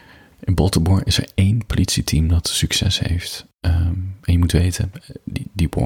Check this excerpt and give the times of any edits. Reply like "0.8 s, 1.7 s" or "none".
none